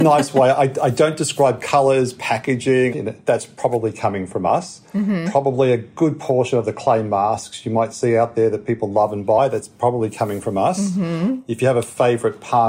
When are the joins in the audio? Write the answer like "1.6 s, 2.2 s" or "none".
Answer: 2.9 s